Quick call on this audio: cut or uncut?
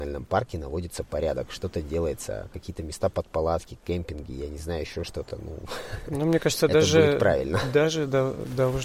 uncut